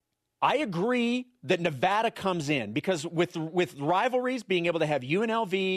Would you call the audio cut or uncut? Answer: uncut